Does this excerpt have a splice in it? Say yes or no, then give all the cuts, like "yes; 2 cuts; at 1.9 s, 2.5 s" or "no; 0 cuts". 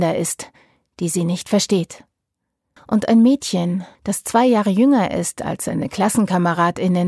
yes; 2 cuts; at 2.8 s, 3.9 s